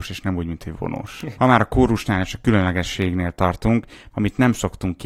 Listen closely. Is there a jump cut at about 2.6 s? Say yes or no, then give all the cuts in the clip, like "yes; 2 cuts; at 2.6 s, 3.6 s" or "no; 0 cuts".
no; 2 cuts; at 1.3 s, 4.1 s